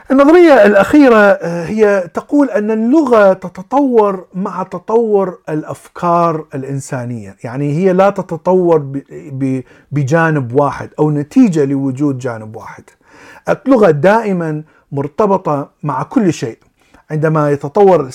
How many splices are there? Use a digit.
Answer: 0